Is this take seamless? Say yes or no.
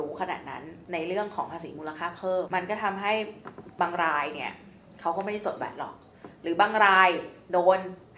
no